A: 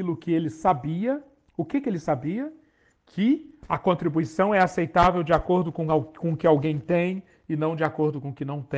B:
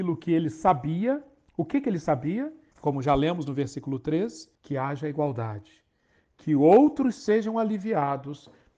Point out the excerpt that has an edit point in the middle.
B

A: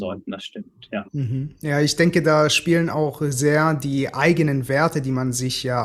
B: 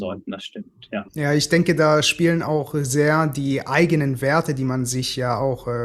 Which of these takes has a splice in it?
B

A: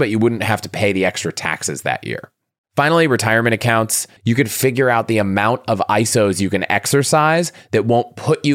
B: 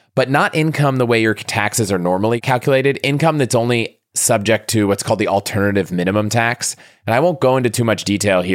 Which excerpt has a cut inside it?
A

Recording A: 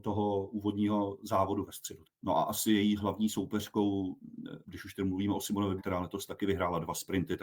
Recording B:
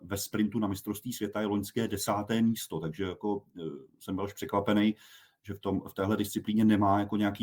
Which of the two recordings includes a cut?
A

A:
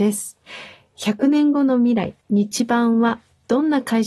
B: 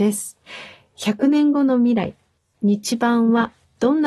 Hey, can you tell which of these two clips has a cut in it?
A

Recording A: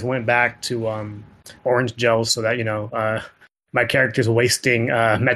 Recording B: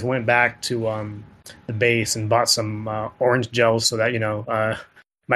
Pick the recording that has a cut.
A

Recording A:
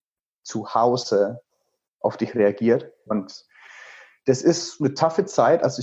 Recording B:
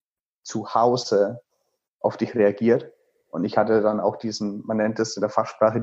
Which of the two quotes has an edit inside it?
A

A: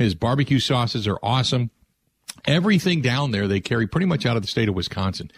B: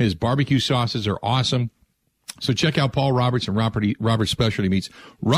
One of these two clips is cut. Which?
B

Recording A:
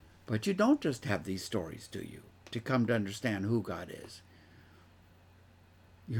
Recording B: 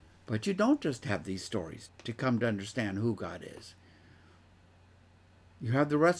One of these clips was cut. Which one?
B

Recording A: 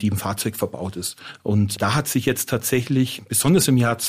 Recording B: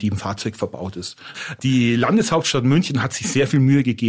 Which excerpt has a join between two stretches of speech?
B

